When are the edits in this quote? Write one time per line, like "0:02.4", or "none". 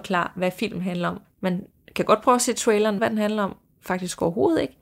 0:01.2
0:03.0